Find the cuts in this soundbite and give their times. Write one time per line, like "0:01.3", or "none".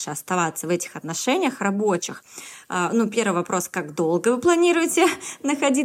none